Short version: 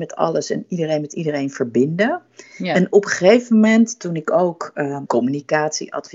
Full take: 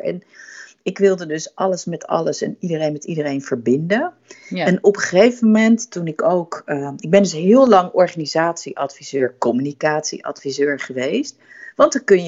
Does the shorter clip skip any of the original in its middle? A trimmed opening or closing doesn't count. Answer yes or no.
yes